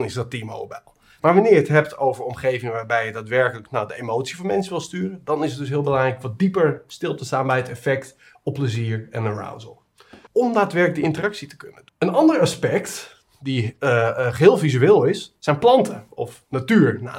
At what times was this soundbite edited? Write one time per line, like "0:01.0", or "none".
0:01.2
0:10.3
0:11.9